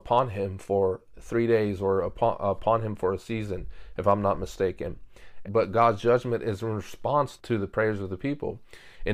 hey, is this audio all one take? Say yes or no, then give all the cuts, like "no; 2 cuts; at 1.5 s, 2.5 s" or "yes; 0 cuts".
no; 2 cuts; at 5.4 s, 7.4 s